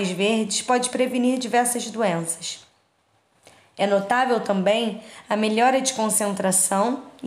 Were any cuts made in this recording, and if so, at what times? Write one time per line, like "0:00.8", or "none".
none